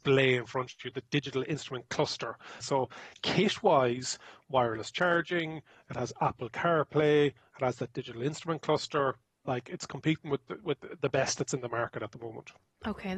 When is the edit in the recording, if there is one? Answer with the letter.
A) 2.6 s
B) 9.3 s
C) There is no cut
A